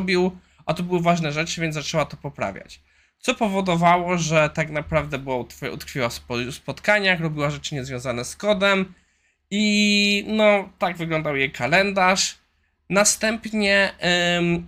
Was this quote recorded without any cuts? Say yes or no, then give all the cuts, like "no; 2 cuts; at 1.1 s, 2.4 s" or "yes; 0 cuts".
yes; 0 cuts